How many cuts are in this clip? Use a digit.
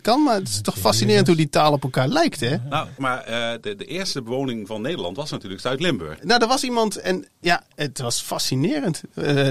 2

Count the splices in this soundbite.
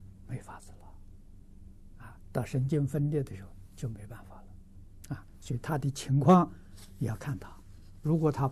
0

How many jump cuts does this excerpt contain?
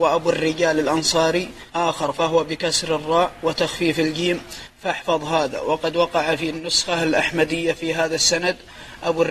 1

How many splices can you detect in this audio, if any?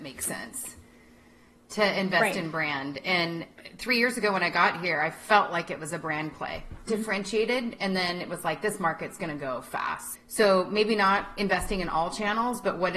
2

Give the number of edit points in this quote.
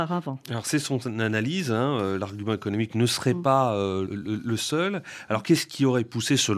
1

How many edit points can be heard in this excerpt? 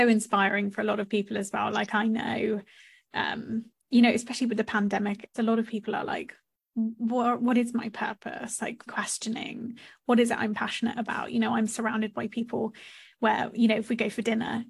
2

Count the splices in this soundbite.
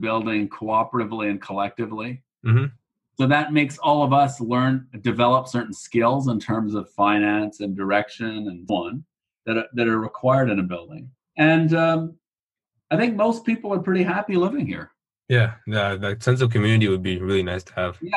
2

